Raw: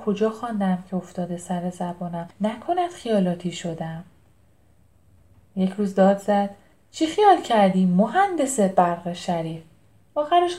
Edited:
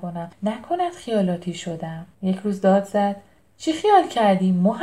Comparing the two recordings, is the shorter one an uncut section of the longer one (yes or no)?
no